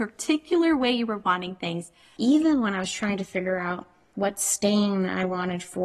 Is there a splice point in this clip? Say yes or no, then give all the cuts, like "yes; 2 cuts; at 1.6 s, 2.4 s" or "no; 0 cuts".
yes; 2 cuts; at 2.2 s, 4.1 s